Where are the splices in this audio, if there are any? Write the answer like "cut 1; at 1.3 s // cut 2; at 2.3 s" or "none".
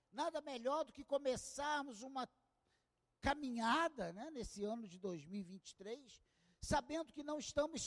none